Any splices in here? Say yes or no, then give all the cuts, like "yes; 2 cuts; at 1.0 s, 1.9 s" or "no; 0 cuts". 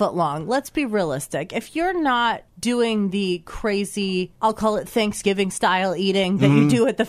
yes; 2 cuts; at 2.5 s, 4.3 s